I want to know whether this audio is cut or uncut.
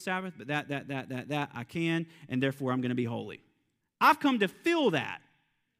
cut